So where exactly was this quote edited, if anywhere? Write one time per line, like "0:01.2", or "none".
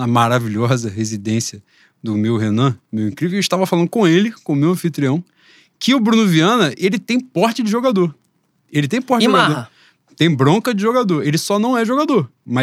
none